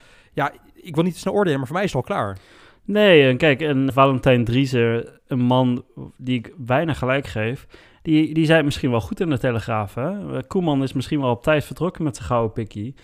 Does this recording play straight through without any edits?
no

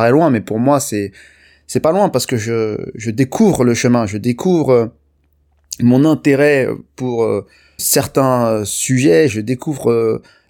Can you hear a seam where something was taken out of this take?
yes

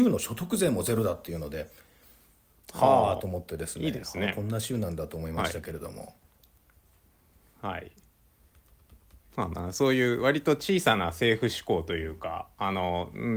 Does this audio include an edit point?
no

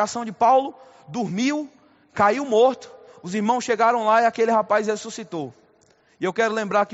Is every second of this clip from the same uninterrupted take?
yes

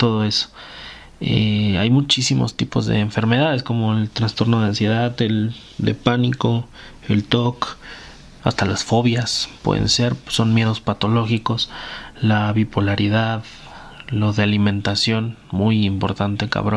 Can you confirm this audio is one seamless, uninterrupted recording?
yes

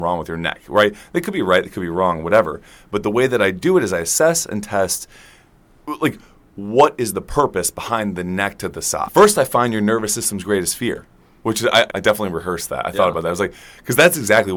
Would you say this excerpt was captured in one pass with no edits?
no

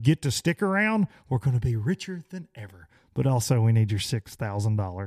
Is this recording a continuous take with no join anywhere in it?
yes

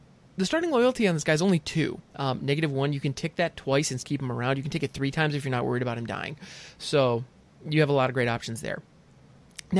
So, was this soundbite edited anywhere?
yes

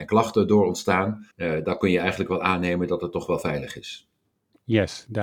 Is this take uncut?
no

